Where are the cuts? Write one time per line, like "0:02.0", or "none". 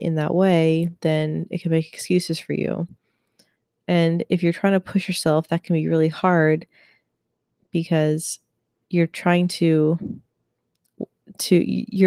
none